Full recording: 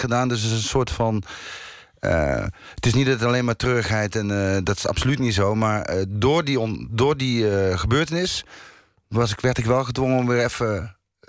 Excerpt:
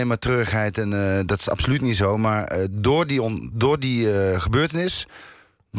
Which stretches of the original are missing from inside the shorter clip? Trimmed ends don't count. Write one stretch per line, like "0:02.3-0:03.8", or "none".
none